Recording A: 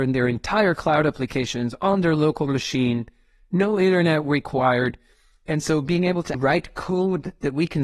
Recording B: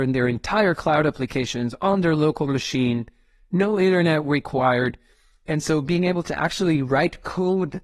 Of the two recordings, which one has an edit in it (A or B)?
A